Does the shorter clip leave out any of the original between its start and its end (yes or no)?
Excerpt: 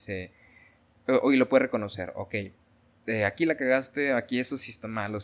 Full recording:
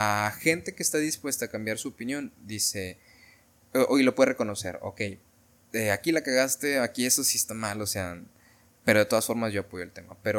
no